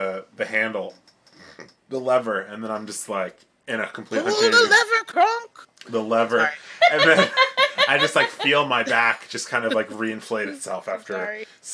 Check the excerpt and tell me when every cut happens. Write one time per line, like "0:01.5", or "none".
none